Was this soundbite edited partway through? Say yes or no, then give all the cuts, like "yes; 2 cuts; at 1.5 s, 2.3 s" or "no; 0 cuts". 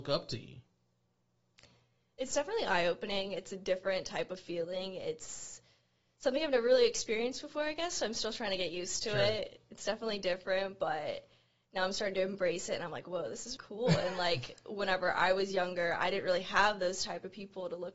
yes; 1 cut; at 13.6 s